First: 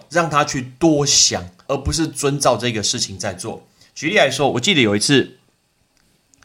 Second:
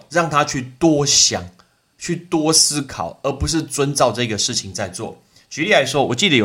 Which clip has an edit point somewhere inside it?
first; 1 cut; at 1.7 s

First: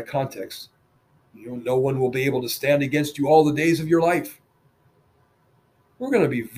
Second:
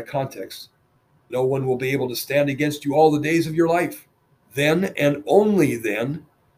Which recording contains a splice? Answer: second; 2 cuts; at 1.3 s, 4.4 s

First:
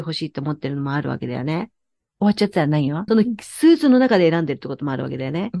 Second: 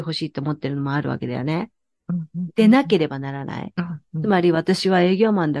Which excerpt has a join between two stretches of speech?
first; 2 cuts; at 2.0 s, 3.1 s

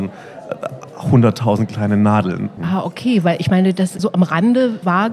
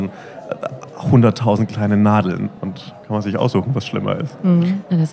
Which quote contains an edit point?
first; 2 cuts; at 2.6 s, 4.0 s

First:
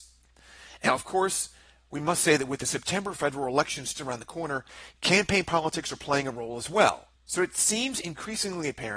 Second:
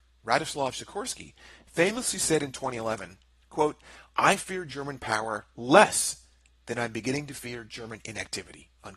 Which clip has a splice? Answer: first; 2 cuts; at 3.9 s, 7.2 s

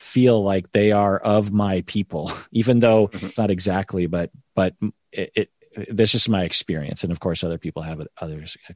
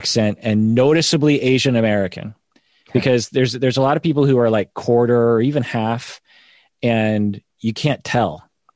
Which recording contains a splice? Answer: first; 1 cut; at 3.4 s

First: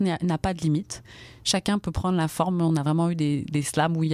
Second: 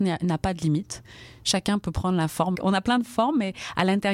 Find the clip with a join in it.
second; 1 cut; at 2.5 s

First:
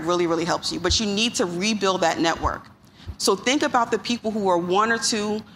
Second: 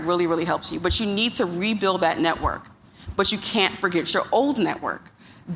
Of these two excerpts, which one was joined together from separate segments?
first; 1 cut; at 3.1 s

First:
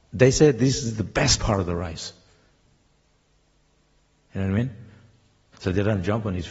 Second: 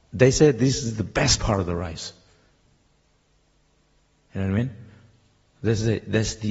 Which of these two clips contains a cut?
first; 1 cut; at 5.5 s

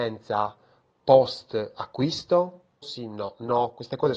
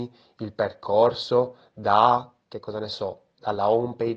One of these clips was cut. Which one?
first; 1 cut; at 2.8 s

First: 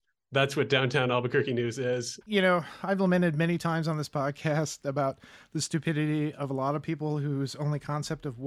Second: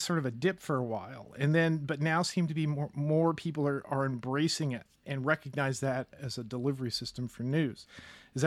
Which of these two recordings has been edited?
first; 1 cut; at 2.2 s

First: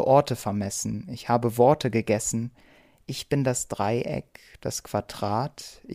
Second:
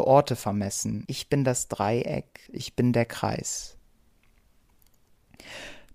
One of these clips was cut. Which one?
second; 2 cuts; at 1.0 s, 2.5 s

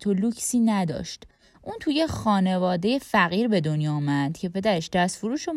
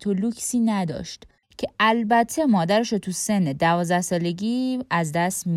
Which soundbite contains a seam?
second; 1 cut; at 1.4 s

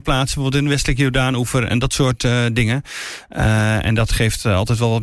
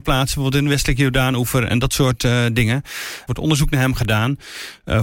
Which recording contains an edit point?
second; 1 cut; at 3.3 s

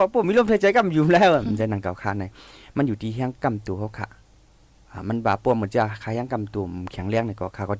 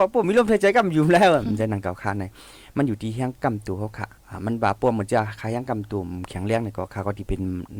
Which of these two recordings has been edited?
second; 1 cut; at 4.2 s

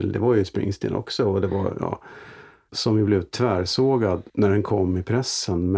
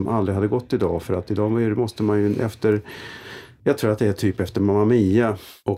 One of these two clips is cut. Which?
first; 2 cuts; at 2.7 s, 4.3 s

